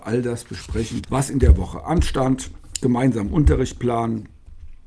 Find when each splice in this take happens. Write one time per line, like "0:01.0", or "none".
0:01.0